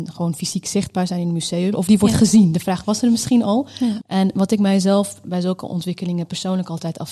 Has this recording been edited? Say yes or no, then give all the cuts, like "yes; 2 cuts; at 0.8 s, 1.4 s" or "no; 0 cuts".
yes; 2 cuts; at 1.7 s, 4.0 s